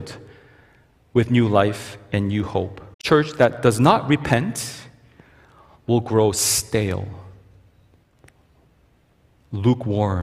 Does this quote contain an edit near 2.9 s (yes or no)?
yes